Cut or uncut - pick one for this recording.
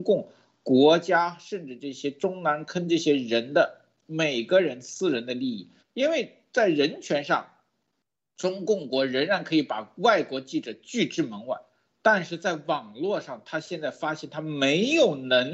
cut